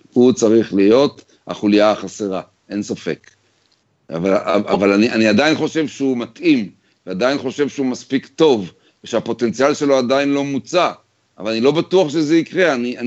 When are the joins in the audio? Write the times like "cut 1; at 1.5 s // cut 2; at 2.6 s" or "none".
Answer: none